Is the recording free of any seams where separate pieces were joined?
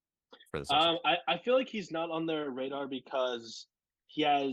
yes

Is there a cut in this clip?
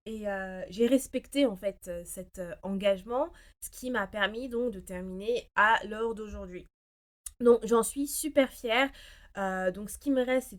no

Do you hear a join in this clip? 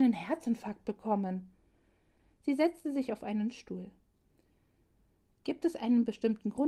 no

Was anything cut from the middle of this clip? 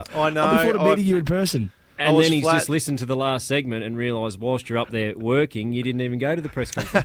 no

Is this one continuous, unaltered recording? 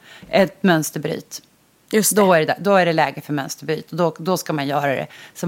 yes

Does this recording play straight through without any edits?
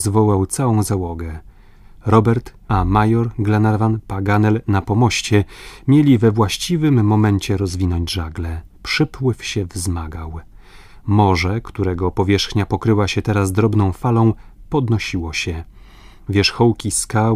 no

